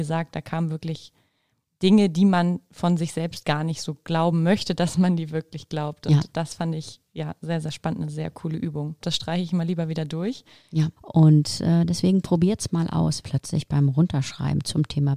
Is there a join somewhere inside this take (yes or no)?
yes